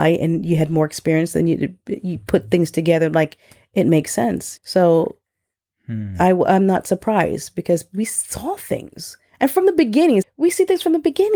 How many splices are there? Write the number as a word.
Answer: two